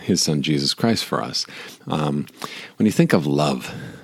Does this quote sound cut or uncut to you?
cut